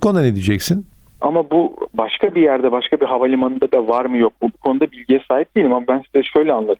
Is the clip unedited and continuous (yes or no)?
no